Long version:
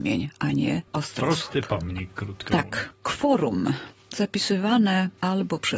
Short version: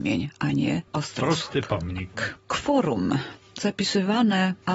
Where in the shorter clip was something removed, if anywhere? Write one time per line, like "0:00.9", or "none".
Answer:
0:02.1